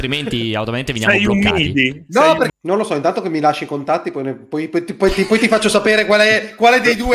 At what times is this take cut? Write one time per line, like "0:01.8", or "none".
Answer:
0:02.5